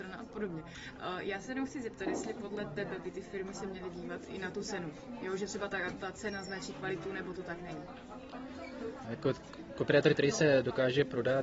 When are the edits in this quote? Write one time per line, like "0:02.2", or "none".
0:09.0